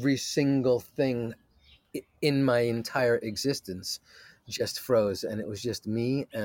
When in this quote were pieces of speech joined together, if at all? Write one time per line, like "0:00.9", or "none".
none